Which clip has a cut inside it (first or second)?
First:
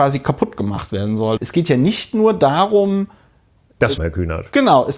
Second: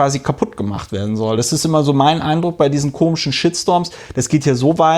first